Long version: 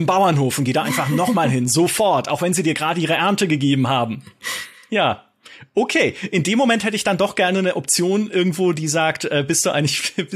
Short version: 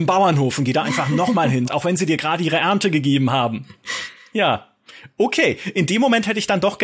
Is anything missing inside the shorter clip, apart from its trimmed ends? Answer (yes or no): yes